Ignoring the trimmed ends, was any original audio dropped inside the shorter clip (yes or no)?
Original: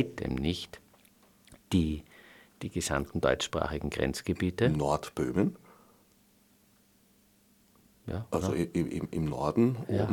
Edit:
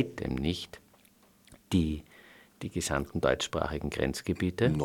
no